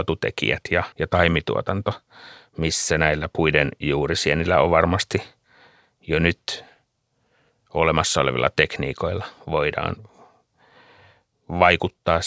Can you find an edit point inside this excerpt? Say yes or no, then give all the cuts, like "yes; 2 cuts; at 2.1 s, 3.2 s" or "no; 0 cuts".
yes; 1 cut; at 0.9 s